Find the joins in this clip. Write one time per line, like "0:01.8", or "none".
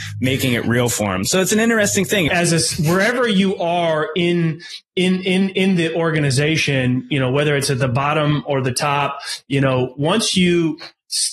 0:02.3